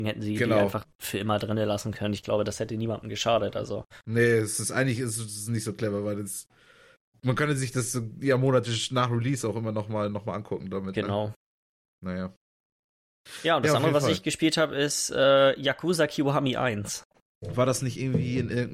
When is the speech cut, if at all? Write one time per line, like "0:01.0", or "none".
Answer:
none